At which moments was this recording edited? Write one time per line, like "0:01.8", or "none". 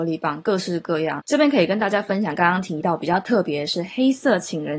0:01.2

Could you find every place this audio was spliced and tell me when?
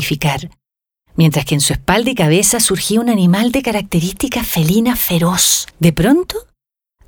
0:05.7

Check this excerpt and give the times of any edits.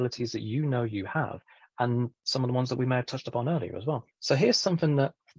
none

